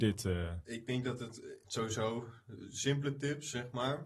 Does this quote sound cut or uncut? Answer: cut